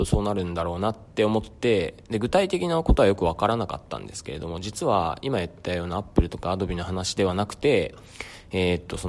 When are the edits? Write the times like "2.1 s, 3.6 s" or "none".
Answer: none